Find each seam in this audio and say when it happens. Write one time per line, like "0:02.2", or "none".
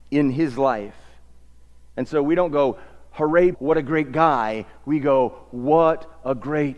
0:03.5

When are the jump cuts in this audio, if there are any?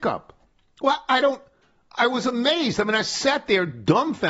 none

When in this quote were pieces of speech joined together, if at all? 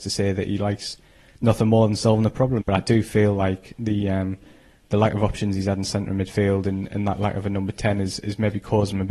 0:02.6

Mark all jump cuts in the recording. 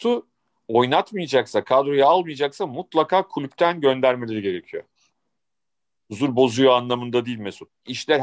0:06.0

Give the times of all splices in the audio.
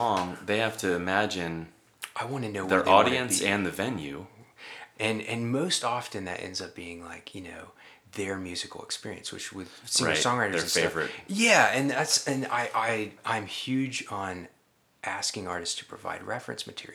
0:04.9

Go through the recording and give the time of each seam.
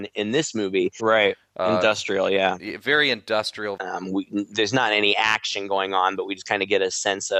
0:01.0
0:03.8

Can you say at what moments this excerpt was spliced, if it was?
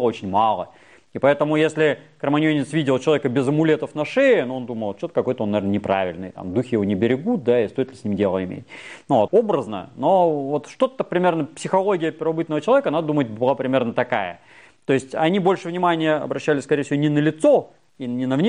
0:09.3

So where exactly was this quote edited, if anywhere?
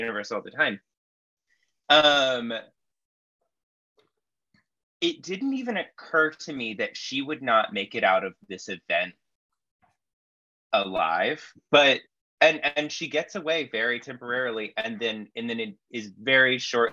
0:11.6

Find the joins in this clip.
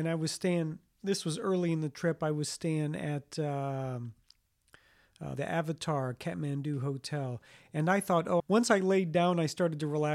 0:05.4
0:08.4

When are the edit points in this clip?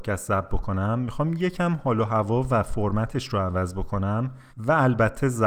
0:04.5

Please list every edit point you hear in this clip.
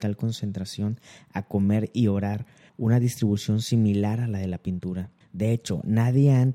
0:02.7
0:05.2

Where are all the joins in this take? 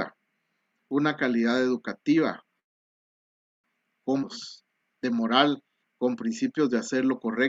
0:05.8

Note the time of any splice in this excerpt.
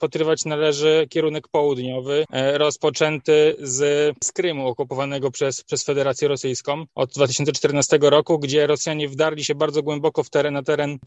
none

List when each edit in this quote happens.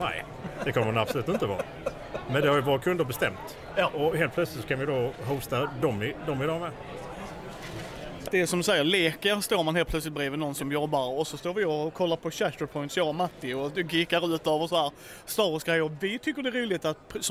0:08.3

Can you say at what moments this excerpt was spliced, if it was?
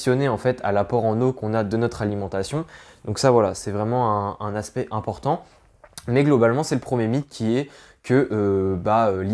none

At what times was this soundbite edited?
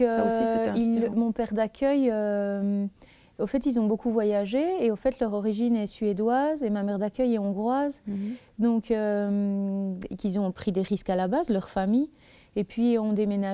none

